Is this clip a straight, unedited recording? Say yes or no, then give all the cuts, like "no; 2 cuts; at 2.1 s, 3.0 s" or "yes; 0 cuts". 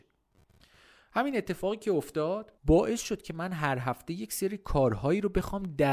no; 1 cut; at 2.6 s